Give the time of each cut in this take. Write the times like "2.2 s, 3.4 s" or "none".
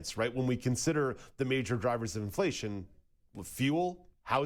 none